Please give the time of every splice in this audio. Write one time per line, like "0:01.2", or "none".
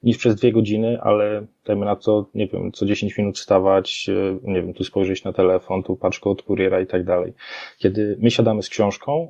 0:04.7
0:05.8